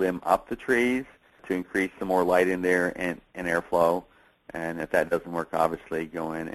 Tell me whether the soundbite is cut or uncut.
uncut